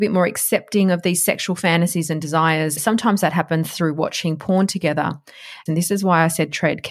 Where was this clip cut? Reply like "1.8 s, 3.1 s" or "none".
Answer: 2.8 s, 5.7 s